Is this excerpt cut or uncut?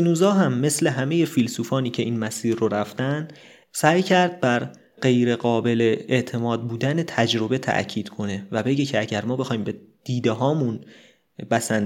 uncut